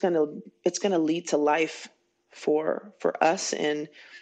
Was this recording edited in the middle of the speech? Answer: no; 0 cuts

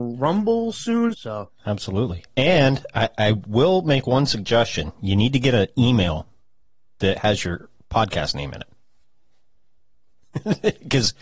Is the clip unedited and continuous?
no; 1 cut; at 1.1 s

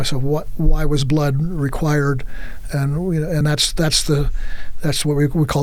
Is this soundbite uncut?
yes; 0 cuts

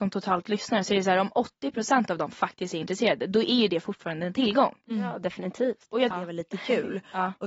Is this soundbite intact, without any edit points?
no; 1 cut; at 6.1 s

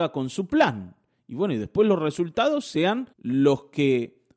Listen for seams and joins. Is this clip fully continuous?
no; 1 cut; at 3.1 s

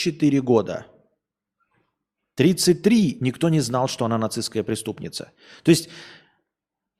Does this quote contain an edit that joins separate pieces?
no; 0 cuts

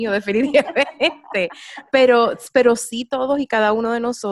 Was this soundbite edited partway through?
no; 0 cuts

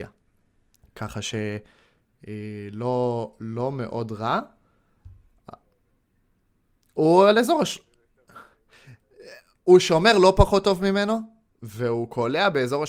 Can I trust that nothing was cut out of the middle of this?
yes; 0 cuts

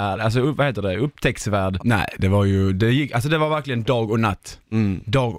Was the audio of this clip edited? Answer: yes; 1 cut; at 1.8 s

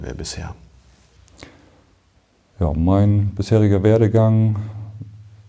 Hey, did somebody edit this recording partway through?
no; 0 cuts

